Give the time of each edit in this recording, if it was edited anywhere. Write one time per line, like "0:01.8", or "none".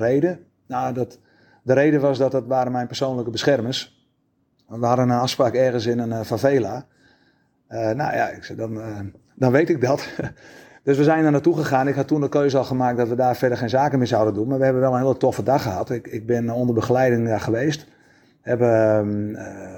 none